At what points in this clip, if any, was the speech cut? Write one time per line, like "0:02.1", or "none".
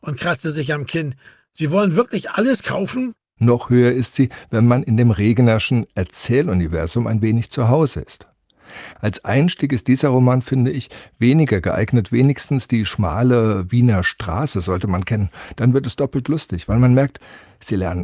0:03.4